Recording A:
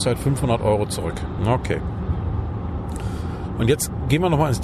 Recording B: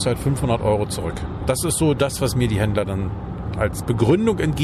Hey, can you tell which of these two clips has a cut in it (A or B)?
A